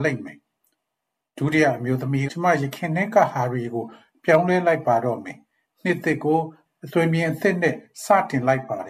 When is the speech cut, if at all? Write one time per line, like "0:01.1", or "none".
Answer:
0:02.3